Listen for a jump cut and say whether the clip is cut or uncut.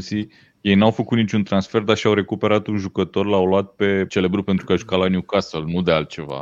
cut